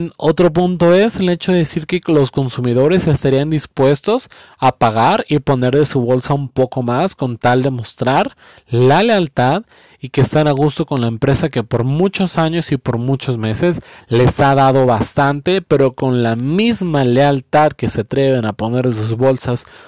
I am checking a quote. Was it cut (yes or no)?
no